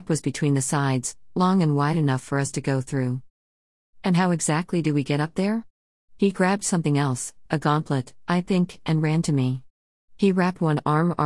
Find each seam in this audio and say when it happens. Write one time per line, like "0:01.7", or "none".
none